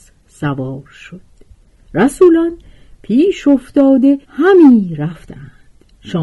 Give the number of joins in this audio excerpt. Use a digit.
1